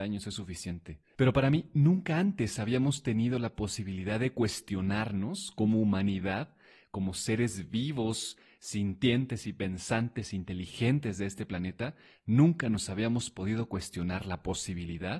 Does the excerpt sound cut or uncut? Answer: uncut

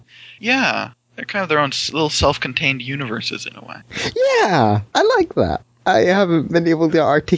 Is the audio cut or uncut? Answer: uncut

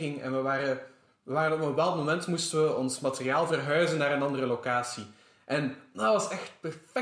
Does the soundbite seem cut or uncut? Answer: cut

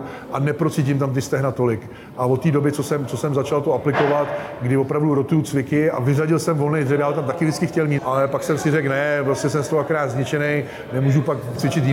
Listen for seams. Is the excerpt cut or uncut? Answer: cut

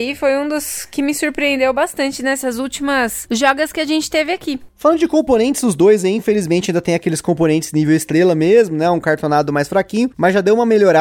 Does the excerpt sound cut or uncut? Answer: uncut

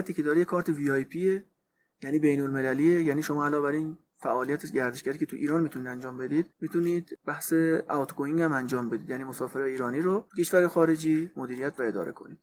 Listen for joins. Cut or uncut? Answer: cut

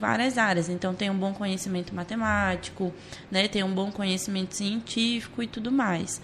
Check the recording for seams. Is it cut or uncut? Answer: uncut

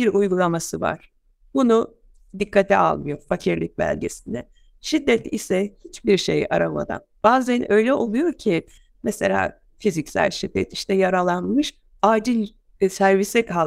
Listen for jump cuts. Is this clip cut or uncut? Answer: uncut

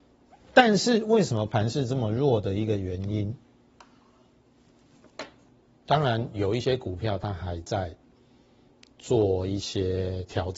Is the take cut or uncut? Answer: uncut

